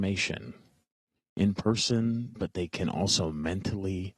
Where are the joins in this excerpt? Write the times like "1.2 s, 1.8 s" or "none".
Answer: 2.4 s